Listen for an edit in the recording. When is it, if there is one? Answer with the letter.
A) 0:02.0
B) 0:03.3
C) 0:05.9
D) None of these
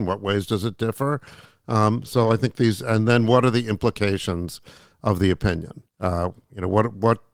C